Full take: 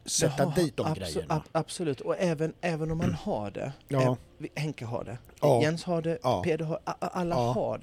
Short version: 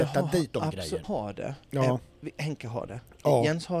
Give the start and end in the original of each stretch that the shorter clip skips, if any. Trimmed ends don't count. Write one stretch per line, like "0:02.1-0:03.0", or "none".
0:01.3-0:03.2